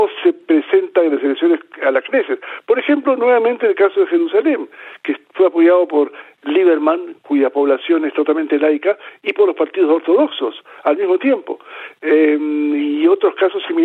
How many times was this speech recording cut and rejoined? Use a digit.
0